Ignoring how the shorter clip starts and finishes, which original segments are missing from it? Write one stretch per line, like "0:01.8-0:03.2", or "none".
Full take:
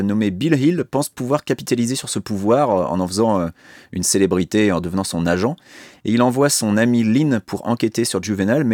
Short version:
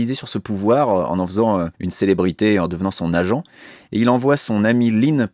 0:03.5-0:03.9